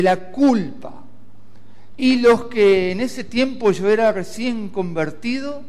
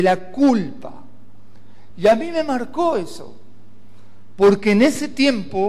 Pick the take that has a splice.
first; 1 cut; at 1.9 s

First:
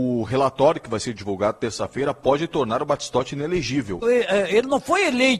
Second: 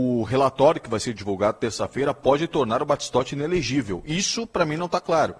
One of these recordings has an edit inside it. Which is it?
first; 1 cut; at 4.0 s

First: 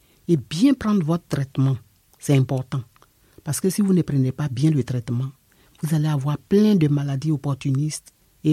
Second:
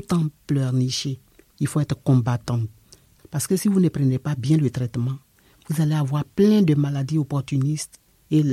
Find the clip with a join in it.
second; 2 cuts; at 1.5 s, 3.2 s

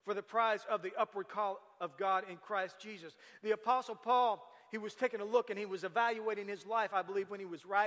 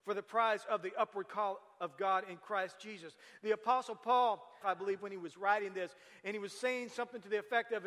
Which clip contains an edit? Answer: second; 1 cut; at 4.6 s

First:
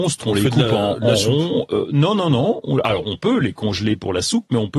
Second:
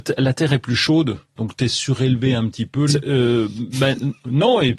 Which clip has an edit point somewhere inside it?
second; 1 cut; at 2.9 s

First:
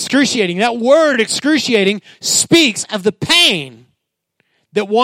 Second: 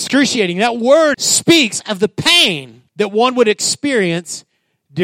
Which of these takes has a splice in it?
second; 2 cuts; at 1.1 s, 2.9 s

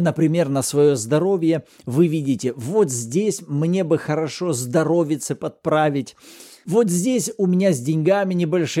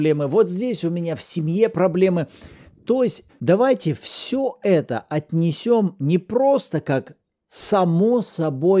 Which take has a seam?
second; 1 cut; at 3.3 s

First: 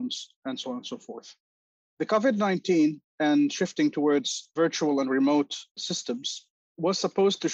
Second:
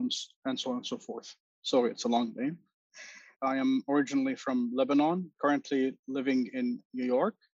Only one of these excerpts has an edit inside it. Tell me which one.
second; 2 cuts; at 1.6 s, 3.3 s

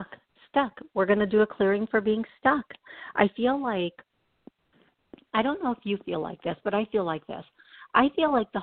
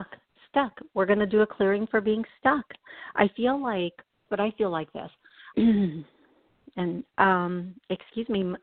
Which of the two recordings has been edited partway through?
second; 2 cuts; at 4.3 s, 5.5 s

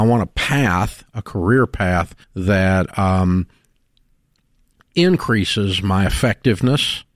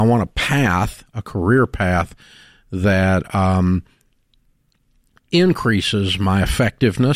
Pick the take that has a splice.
first; 1 cut; at 2.2 s

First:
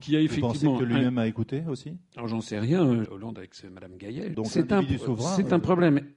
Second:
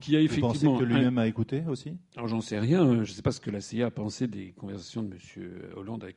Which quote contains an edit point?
first; 2 cuts; at 3.1 s, 4.3 s

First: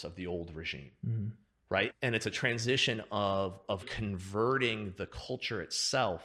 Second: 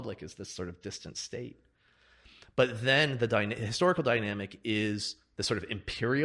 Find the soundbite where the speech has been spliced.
first; 2 cuts; at 1.9 s, 3.8 s

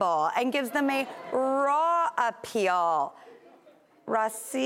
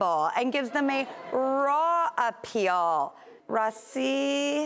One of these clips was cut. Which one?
second; 1 cut; at 3.4 s

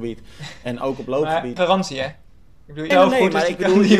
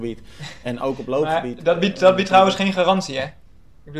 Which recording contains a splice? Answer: first; 2 cuts; at 1.6 s, 2.9 s

